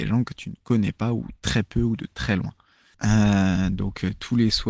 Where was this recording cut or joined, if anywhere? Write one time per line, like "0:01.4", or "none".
0:02.9